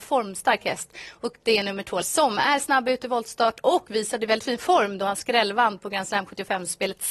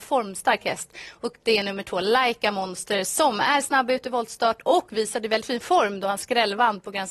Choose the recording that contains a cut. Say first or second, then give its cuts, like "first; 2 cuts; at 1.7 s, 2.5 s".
first; 1 cut; at 2.0 s